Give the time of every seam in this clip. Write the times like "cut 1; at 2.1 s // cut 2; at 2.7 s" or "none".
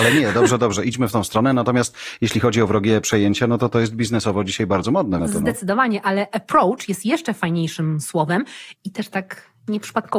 cut 1; at 5.2 s // cut 2; at 8.8 s